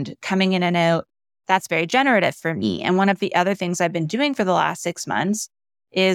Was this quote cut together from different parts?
no; 0 cuts

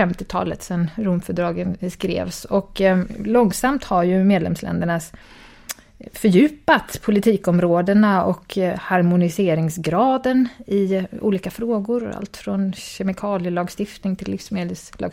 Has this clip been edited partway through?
no; 0 cuts

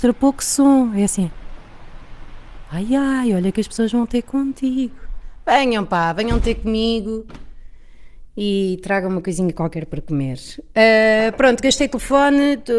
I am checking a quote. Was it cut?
no; 0 cuts

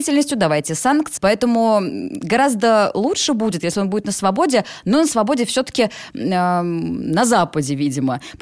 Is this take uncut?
no; 1 cut; at 1.2 s

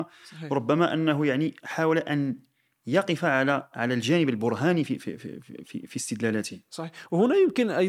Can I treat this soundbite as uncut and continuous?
yes; 0 cuts

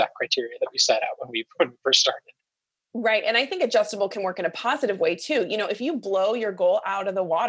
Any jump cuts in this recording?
no; 0 cuts

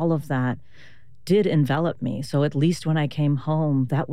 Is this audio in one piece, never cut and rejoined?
yes; 0 cuts

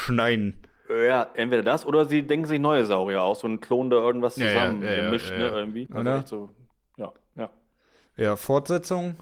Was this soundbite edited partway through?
yes; 1 cut; at 5.9 s

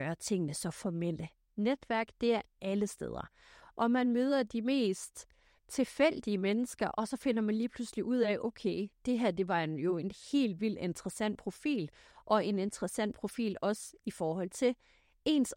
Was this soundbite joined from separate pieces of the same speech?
yes; 1 cut; at 1.5 s

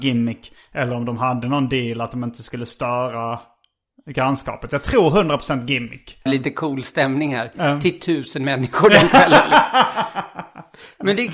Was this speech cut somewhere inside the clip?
yes; 1 cut; at 6.3 s

